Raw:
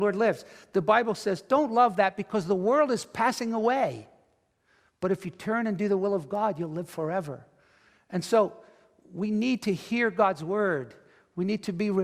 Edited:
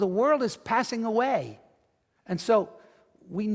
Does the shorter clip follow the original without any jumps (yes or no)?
no